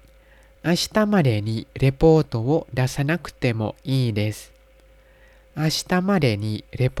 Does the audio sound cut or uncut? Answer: uncut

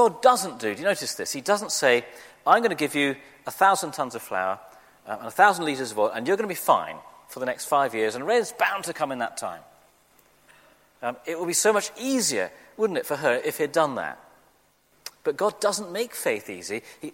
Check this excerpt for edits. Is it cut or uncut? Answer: uncut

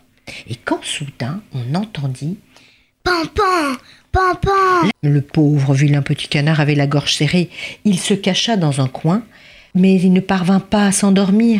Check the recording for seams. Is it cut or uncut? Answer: cut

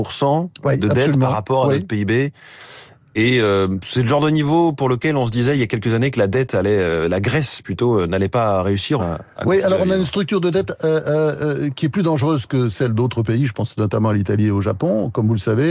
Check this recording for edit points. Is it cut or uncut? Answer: cut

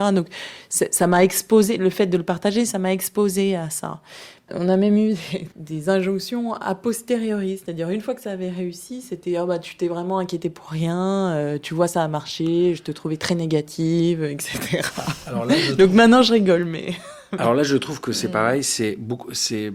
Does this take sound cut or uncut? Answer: uncut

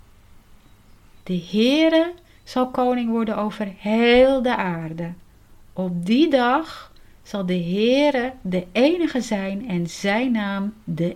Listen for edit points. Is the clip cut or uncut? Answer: cut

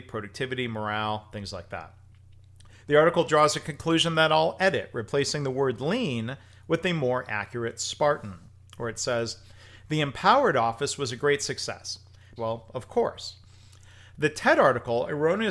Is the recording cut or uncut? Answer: cut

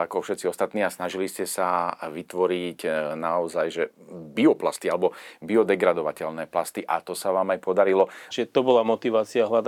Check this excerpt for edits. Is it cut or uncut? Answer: cut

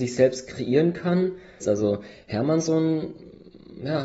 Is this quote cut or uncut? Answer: cut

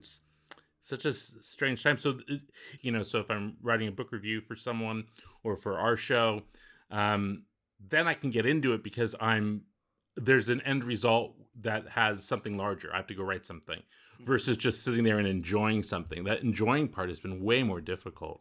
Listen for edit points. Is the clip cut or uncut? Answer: cut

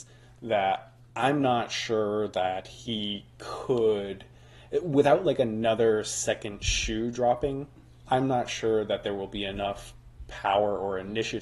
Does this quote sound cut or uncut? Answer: uncut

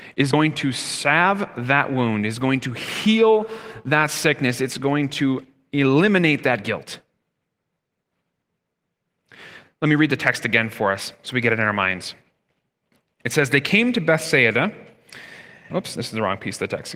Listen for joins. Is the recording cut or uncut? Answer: cut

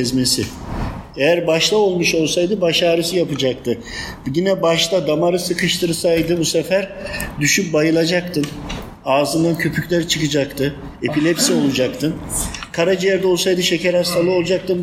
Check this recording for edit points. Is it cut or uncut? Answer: uncut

